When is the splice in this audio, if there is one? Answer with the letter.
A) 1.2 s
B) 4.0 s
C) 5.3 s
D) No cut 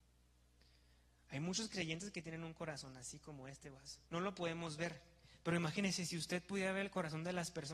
B